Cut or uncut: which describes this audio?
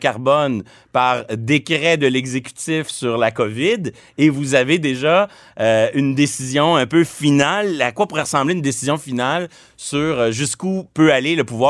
uncut